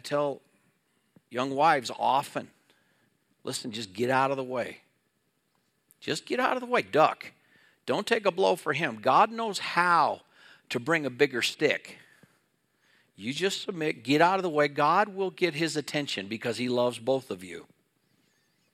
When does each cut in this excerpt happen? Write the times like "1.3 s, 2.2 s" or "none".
none